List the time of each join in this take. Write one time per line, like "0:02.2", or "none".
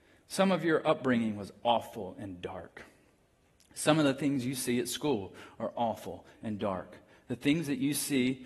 none